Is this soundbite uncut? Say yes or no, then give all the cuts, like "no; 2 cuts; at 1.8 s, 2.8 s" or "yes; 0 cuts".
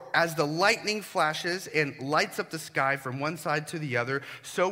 yes; 0 cuts